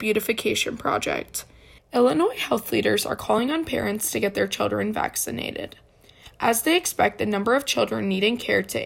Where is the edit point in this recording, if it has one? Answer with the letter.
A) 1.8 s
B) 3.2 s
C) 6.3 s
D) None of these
A